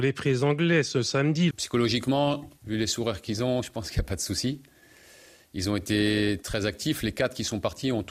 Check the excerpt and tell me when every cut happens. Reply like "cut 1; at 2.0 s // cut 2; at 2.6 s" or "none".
cut 1; at 1.5 s